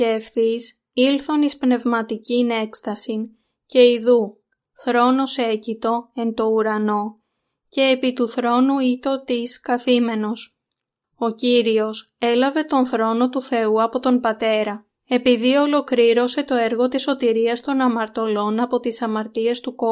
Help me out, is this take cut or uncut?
cut